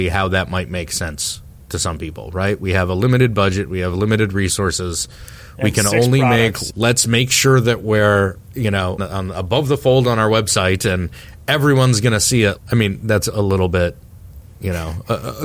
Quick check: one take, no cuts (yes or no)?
no